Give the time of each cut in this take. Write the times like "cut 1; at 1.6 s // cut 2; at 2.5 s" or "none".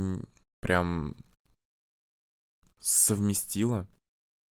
none